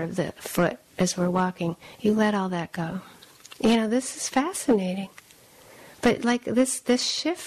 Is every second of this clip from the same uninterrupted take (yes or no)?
no